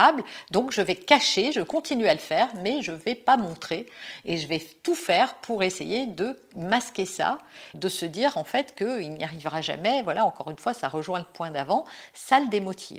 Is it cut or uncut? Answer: cut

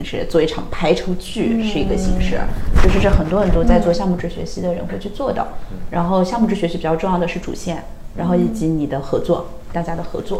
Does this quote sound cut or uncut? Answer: uncut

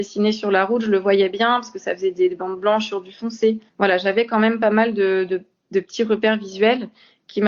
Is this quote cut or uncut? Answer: cut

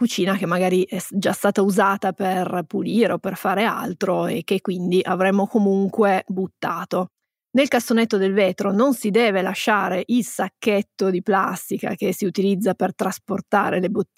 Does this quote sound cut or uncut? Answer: uncut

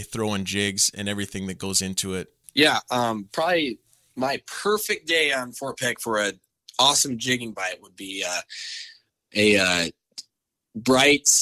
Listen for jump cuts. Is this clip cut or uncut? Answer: cut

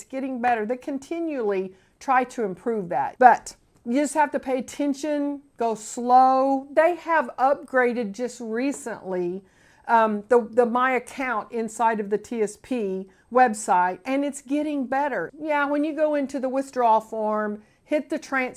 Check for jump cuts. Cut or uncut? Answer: cut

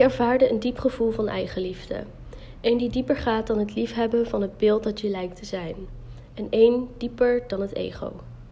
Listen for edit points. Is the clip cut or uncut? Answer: uncut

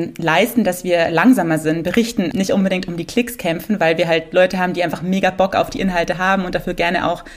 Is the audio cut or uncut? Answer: cut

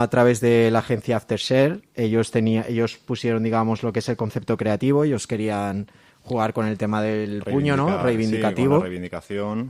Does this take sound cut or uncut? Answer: uncut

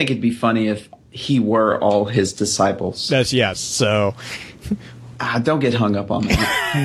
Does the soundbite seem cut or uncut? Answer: cut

